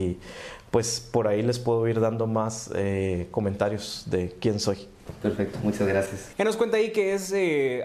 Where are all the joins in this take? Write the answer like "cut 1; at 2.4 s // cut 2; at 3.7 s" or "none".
cut 1; at 6.3 s